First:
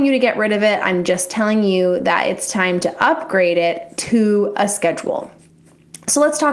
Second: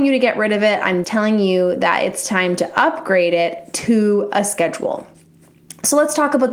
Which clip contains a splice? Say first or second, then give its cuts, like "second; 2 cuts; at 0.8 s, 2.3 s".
second; 1 cut; at 1.0 s